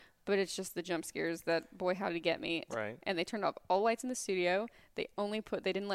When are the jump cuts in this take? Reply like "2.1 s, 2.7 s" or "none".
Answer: 2.7 s